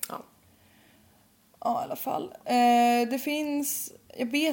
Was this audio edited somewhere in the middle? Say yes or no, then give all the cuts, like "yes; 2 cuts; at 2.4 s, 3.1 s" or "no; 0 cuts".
no; 0 cuts